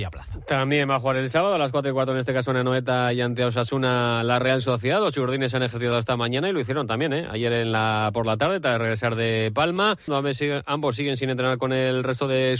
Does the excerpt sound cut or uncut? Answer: cut